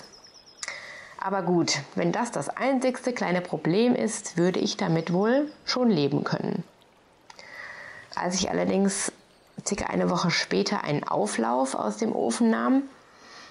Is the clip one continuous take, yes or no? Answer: yes